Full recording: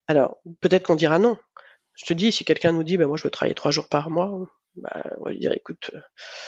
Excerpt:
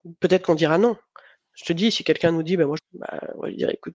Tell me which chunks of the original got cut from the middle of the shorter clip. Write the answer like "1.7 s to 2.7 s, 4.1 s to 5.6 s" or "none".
3.2 s to 4.6 s